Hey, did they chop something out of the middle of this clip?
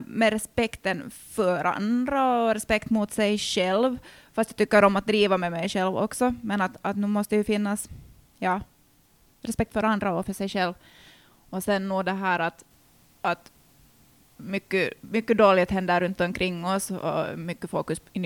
no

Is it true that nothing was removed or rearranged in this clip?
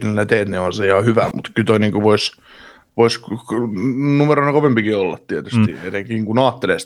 no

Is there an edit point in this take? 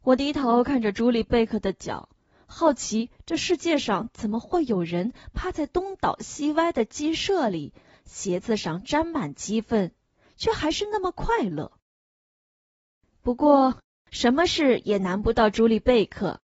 yes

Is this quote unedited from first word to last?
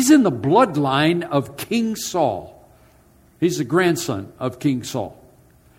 yes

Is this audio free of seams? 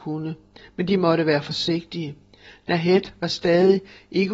yes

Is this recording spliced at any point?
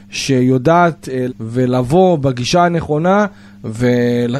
yes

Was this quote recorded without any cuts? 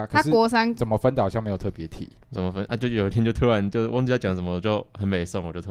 yes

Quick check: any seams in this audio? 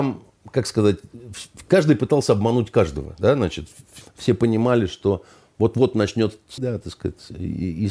yes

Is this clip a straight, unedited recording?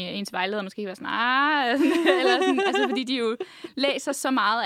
yes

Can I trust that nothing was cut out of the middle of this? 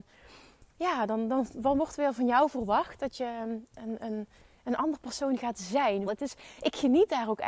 no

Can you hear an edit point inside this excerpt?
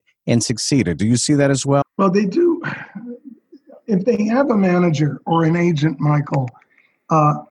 yes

